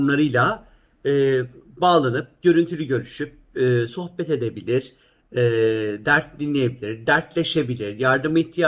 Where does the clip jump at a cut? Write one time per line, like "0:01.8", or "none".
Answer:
none